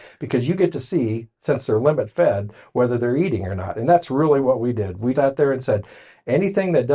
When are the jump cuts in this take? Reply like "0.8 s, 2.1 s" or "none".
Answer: 5.1 s